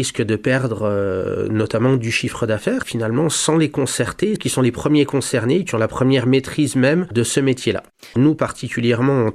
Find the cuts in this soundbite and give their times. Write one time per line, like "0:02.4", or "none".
0:02.8
0:04.4
0:08.1